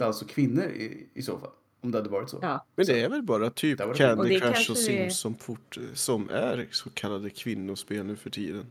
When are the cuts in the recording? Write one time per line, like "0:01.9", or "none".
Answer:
none